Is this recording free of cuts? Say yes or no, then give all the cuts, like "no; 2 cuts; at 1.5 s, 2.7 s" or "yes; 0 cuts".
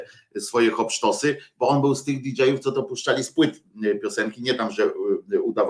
yes; 0 cuts